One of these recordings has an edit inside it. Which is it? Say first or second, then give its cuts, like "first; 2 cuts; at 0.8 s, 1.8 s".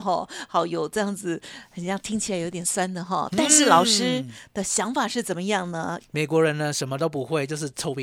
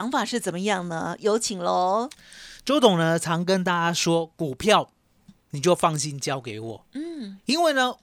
first; 2 cuts; at 2.6 s, 6.0 s